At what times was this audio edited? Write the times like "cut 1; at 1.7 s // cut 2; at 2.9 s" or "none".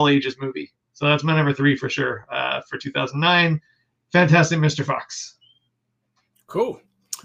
none